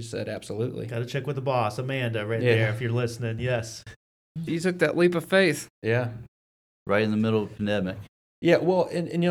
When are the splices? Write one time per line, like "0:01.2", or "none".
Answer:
0:04.5